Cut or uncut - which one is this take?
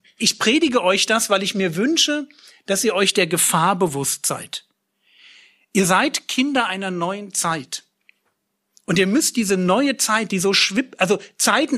uncut